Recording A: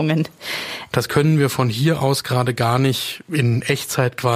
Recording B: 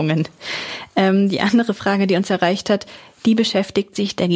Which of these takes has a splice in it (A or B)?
A